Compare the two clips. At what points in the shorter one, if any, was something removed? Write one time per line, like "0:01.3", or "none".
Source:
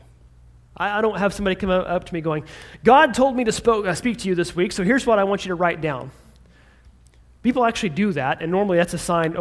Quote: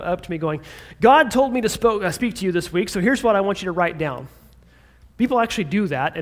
0:05.1